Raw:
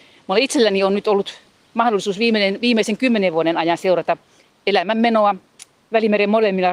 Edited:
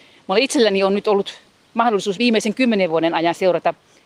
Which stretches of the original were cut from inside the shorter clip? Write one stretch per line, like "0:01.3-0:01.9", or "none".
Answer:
0:02.2-0:02.6